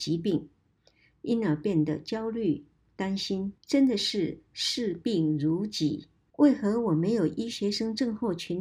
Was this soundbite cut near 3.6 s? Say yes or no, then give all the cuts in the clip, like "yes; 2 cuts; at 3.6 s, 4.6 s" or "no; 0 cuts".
yes; 2 cuts; at 3.6 s, 6.3 s